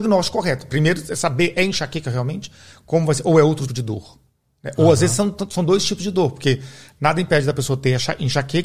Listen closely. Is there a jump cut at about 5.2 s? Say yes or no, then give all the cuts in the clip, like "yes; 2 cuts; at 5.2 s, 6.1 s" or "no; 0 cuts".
no; 1 cut; at 3.7 s